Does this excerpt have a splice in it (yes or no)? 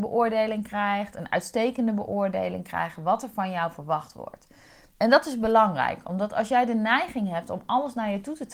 no